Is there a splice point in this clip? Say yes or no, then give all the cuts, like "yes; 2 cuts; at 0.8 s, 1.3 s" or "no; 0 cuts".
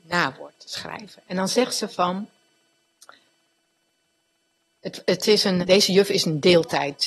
yes; 1 cut; at 5.6 s